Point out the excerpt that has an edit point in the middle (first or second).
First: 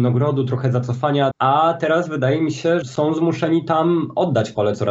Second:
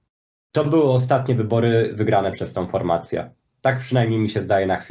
first